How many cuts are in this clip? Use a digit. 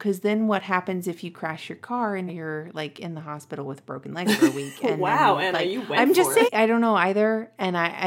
2